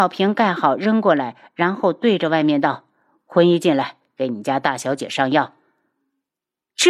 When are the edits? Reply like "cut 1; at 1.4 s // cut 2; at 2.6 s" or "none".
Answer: none